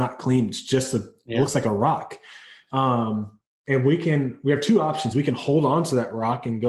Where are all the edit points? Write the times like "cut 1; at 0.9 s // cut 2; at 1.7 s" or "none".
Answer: none